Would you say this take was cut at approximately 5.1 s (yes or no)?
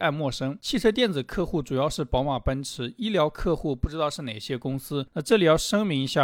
yes